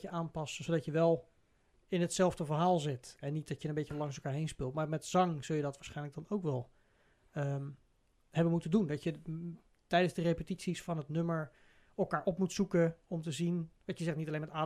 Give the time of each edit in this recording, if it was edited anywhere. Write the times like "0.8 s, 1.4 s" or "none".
none